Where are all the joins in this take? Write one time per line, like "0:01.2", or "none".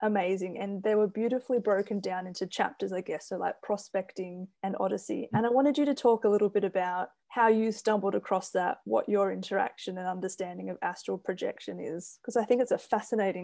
0:04.5
0:07.2